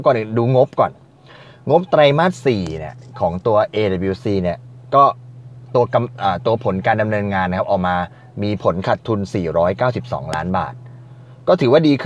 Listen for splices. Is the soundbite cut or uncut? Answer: uncut